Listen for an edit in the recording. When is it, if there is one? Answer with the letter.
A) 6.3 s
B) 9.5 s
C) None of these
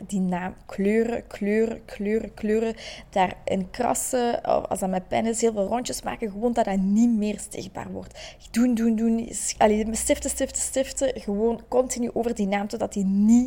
B